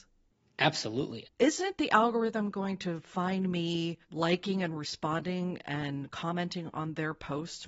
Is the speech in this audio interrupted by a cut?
yes; 2 cuts; at 1.2 s, 4.0 s

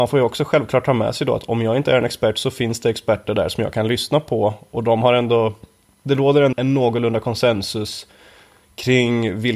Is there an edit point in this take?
yes; 1 cut; at 6.5 s

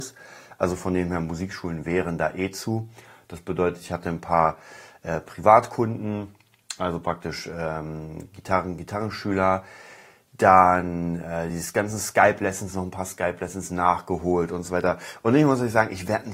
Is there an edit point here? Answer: no; 0 cuts

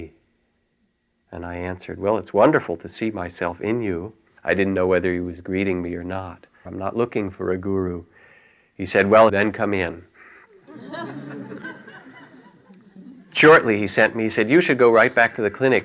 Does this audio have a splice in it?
yes; 3 cuts; at 4.4 s, 6.7 s, 9.3 s

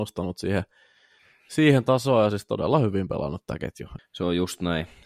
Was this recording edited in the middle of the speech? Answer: yes; 1 cut; at 4.0 s

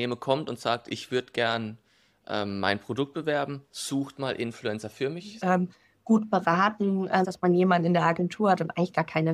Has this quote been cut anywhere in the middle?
yes; 2 cuts; at 5.4 s, 7.2 s

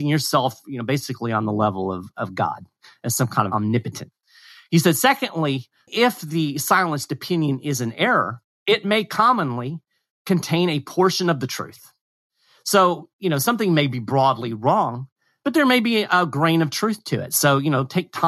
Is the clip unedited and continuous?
no; 1 cut; at 5.9 s

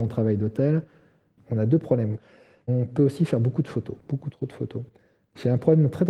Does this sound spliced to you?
yes; 2 cuts; at 1.4 s, 4.0 s

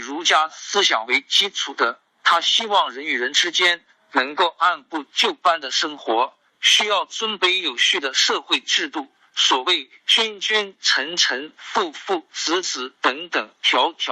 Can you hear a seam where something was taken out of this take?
no; 0 cuts

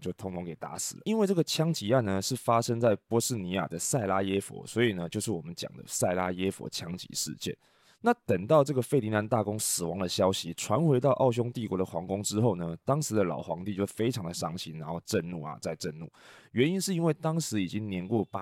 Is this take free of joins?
yes; 0 cuts

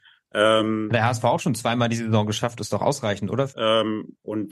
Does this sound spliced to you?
yes; 1 cut; at 3.5 s

